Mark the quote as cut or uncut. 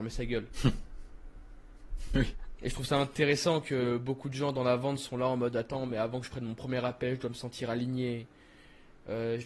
uncut